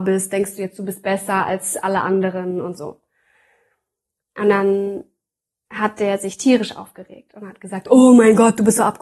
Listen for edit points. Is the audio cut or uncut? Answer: cut